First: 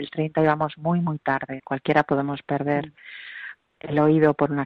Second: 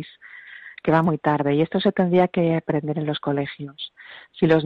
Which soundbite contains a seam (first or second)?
first